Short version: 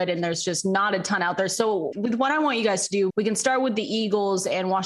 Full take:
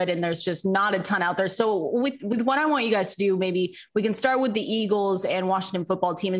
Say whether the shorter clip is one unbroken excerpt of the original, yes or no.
no